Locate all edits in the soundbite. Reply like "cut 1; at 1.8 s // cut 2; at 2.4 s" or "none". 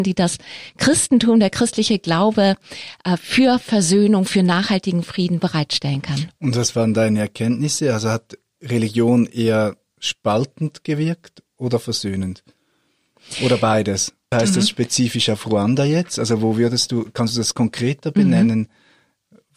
cut 1; at 14.3 s